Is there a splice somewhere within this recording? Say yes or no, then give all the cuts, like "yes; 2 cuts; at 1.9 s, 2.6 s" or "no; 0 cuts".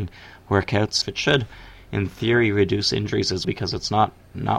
yes; 2 cuts; at 1.0 s, 3.4 s